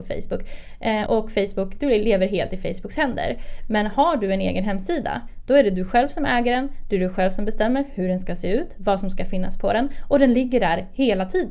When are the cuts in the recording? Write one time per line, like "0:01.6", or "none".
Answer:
0:01.1